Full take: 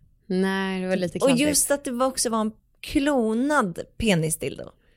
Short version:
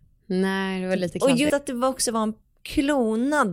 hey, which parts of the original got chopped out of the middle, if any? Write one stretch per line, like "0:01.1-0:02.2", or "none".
0:01.5-0:01.7